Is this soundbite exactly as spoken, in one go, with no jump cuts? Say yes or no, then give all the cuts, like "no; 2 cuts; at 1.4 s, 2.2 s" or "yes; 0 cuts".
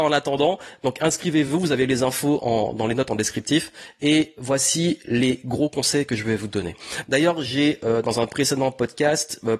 yes; 0 cuts